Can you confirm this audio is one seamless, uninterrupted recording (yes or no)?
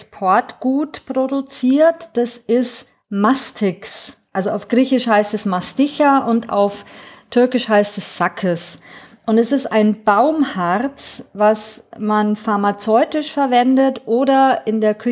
yes